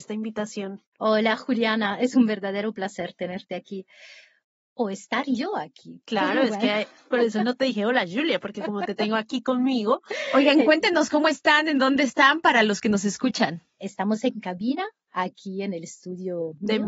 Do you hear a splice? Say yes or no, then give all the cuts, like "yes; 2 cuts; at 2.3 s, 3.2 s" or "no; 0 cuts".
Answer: yes; 2 cuts; at 0.9 s, 10.6 s